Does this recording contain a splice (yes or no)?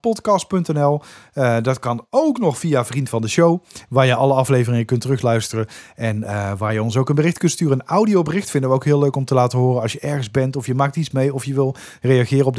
no